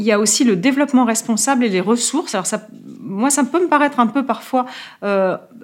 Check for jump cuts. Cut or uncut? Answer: uncut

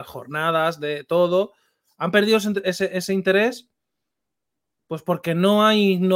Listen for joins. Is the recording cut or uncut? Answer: uncut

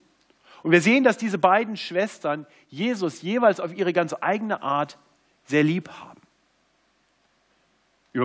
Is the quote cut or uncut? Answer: uncut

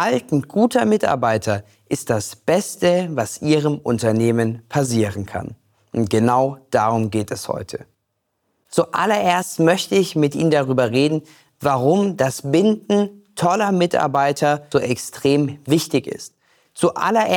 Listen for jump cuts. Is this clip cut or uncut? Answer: cut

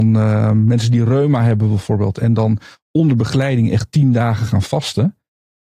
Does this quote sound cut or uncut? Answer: uncut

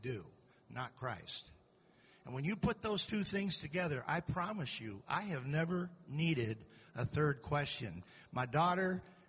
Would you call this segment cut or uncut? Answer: uncut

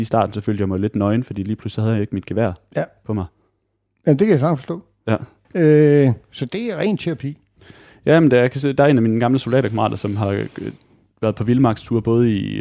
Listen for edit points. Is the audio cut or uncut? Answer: cut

